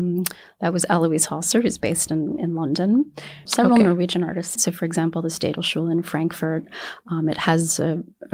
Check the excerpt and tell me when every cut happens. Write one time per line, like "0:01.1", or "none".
0:03.5
0:04.6